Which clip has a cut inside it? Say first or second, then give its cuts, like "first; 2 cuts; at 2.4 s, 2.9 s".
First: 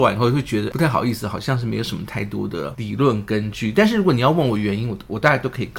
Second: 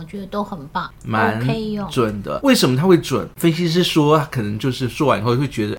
second; 2 cuts; at 0.9 s, 3.3 s